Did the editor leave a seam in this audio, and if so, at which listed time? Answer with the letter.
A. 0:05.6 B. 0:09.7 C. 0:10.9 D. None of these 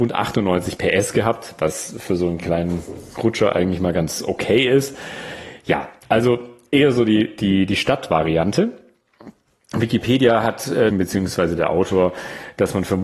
C